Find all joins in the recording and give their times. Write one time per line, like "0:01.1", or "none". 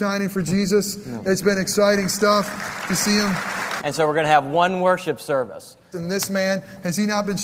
0:03.8
0:05.9